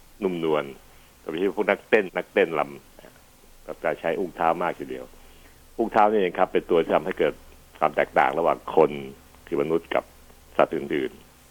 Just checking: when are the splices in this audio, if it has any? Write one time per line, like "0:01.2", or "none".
0:02.1